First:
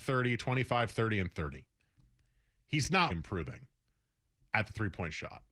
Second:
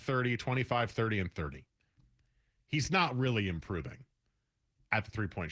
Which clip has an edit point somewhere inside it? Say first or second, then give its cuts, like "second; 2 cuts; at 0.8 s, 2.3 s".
first; 1 cut; at 3.1 s